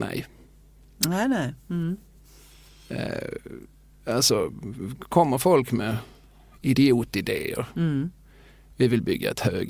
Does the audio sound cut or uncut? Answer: uncut